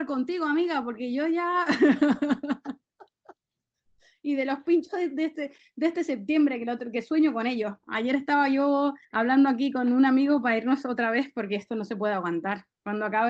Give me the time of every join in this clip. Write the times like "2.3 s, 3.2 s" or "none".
7.8 s, 9.0 s

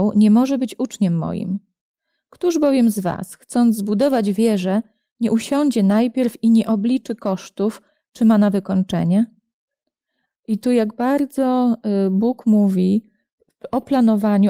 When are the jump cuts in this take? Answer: 10.3 s

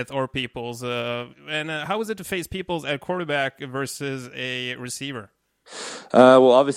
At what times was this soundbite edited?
none

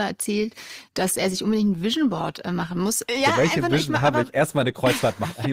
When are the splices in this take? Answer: 3.1 s

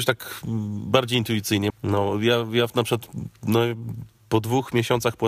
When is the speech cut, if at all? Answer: 1.7 s

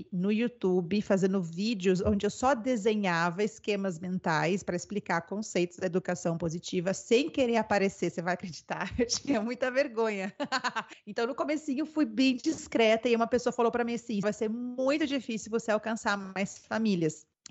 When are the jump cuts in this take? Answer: 10.9 s, 14.2 s

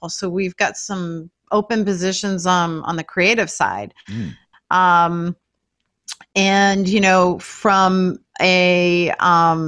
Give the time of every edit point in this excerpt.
4.5 s

